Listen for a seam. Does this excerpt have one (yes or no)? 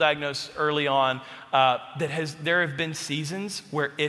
no